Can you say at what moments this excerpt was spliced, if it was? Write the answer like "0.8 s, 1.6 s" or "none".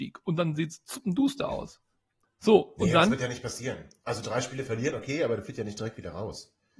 2.2 s